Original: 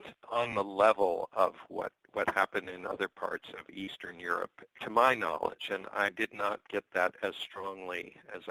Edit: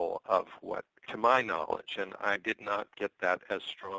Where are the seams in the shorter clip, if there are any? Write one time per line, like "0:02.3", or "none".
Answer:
0:01.0